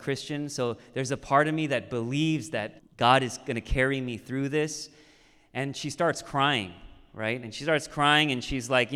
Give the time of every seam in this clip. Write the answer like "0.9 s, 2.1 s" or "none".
2.8 s